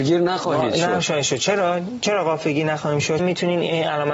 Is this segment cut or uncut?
cut